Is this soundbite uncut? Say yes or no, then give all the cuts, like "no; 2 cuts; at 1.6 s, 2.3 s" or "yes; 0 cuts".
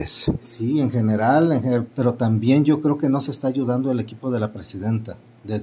no; 1 cut; at 1.9 s